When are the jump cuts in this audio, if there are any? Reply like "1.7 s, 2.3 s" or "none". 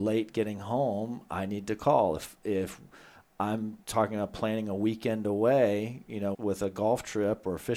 6.3 s